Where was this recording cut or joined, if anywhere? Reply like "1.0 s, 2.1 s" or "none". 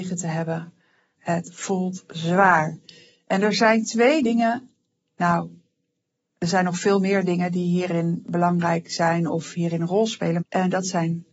1.2 s, 10.4 s